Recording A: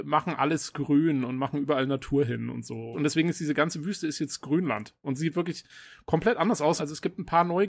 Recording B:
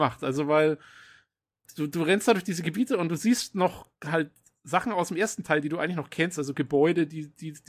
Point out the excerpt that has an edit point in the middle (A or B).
A